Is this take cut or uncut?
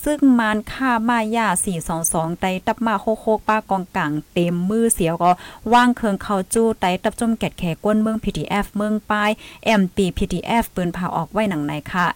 uncut